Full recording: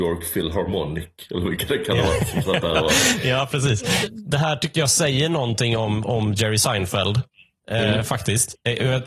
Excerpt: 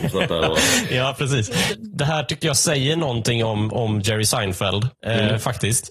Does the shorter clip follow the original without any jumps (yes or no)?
no